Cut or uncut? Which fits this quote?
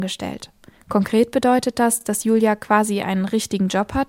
uncut